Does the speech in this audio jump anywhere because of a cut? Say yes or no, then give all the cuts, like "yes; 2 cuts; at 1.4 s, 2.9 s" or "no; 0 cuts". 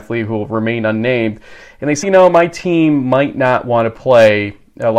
yes; 1 cut; at 2.0 s